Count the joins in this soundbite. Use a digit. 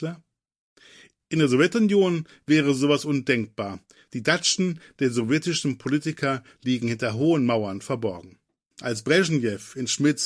1